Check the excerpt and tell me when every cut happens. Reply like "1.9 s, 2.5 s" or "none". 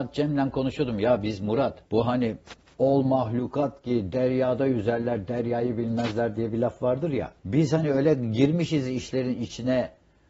1.9 s, 7.4 s